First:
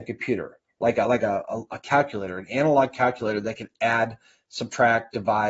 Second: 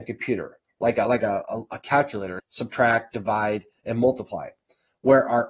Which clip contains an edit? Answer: second; 1 cut; at 2.4 s

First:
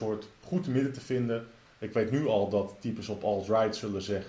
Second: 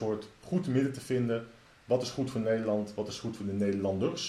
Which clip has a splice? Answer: first; 1 cut; at 1.8 s

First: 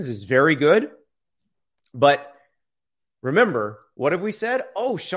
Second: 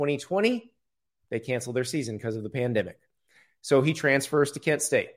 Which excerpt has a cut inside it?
first; 1 cut; at 3.9 s

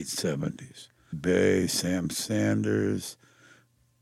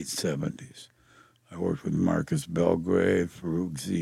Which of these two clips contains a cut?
first; 1 cut; at 1.1 s

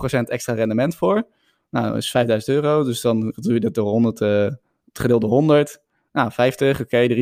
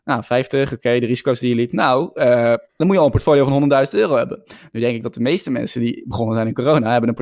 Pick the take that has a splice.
second; 1 cut; at 2.7 s

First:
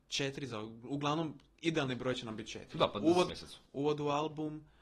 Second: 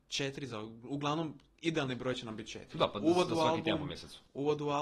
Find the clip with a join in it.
first; 1 cut; at 3.3 s

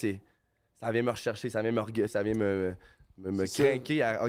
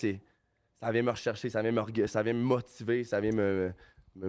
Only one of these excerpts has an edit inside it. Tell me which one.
first; 1 cut; at 2.1 s

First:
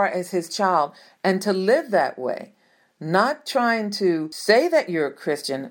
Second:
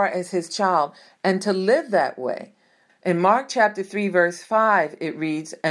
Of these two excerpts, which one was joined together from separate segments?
second; 1 cut; at 2.9 s

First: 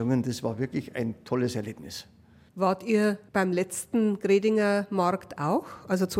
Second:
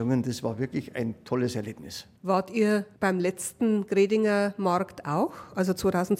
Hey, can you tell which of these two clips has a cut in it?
second; 1 cut; at 2.1 s

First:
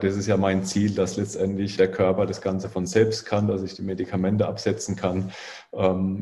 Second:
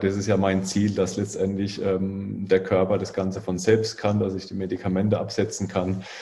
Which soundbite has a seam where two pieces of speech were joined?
first; 1 cut; at 1.7 s

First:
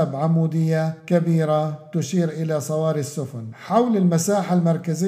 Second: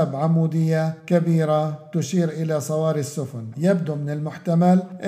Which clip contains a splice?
second; 1 cut; at 3.5 s

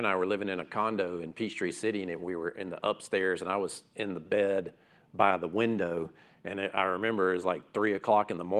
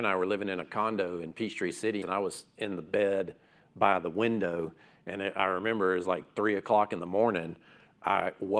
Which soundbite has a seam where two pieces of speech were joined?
second; 1 cut; at 2.0 s

